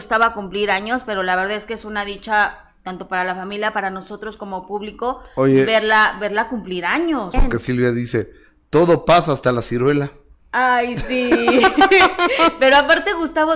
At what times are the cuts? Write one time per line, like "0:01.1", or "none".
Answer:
0:07.3